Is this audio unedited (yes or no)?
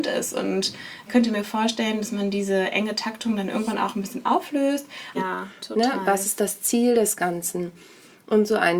no